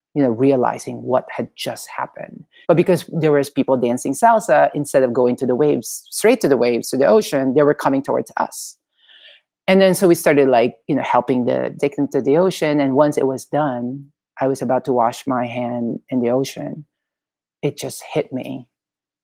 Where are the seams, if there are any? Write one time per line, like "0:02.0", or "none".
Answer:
0:02.6
0:11.8